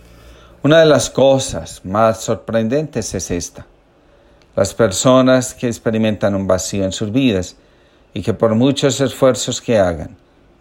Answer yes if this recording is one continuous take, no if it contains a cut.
yes